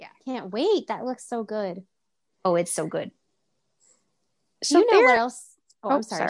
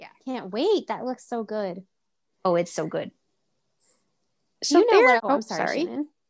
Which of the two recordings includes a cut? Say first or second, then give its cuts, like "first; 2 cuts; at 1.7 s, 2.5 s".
second; 1 cut; at 5.2 s